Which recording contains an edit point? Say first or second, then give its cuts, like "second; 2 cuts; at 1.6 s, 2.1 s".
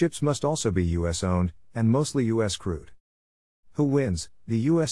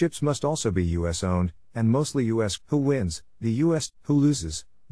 second; 2 cuts; at 2.6 s, 3.9 s